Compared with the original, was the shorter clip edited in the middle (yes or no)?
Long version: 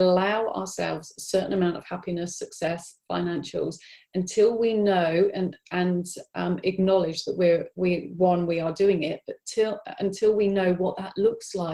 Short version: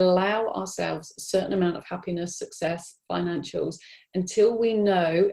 no